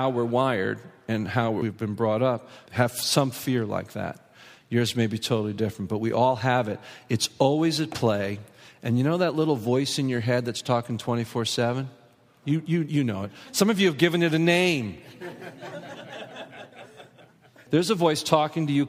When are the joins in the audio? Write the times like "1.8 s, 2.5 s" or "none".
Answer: 12.4 s

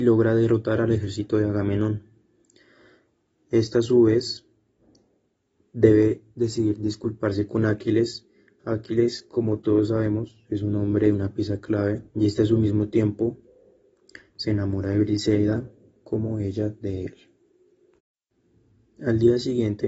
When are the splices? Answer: 8.6 s, 12.1 s

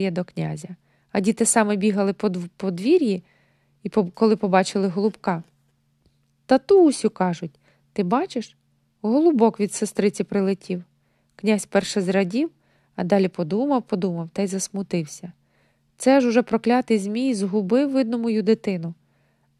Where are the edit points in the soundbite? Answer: none

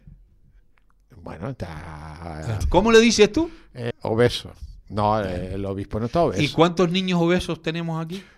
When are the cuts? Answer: 2.6 s, 3.9 s

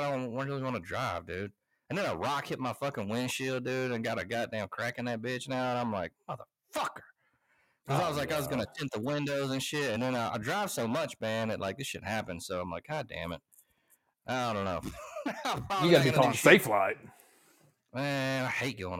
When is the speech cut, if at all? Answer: none

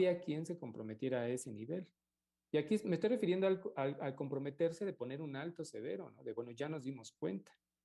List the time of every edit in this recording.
none

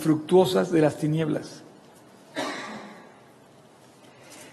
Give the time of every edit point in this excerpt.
none

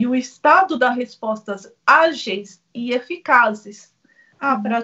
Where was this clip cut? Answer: none

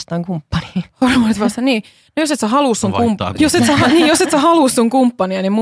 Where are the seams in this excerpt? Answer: 3.4 s

